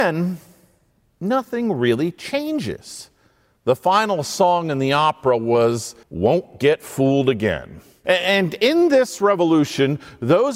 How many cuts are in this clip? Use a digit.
2